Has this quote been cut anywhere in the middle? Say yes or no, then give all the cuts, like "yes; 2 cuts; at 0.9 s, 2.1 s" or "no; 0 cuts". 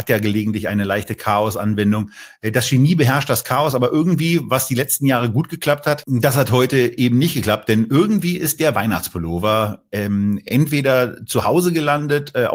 no; 0 cuts